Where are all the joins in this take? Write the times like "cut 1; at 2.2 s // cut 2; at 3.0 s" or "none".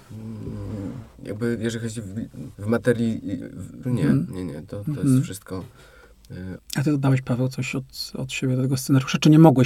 cut 1; at 2.5 s // cut 2; at 3.8 s // cut 3; at 6.6 s